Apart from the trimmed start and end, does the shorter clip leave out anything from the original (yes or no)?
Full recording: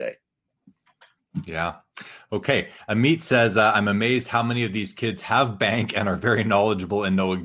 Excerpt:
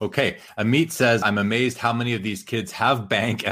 yes